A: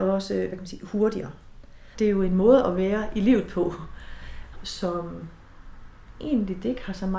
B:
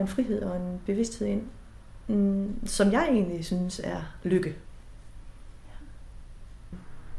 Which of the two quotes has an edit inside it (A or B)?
A